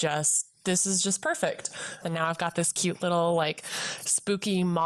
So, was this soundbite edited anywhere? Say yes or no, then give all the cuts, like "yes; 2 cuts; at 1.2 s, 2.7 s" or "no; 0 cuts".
yes; 1 cut; at 2.0 s